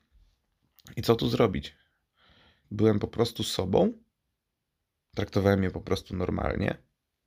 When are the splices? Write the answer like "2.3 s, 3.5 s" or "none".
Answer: 2.6 s